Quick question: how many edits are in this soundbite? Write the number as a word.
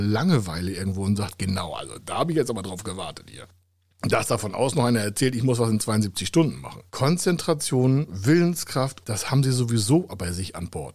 two